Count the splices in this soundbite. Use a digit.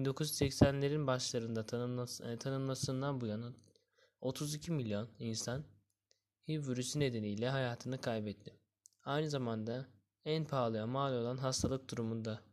0